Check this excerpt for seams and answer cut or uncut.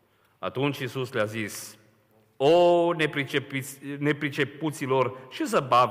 uncut